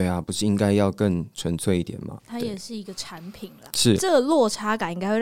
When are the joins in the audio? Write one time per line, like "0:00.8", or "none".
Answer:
0:02.2
0:03.7